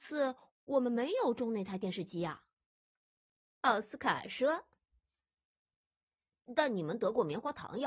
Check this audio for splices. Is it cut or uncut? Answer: uncut